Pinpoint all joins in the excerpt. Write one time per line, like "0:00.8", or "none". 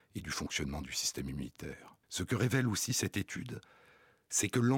0:02.0